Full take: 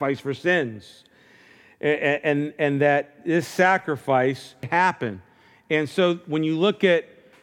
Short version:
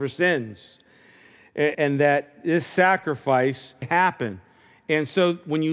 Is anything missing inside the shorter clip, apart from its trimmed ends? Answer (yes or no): yes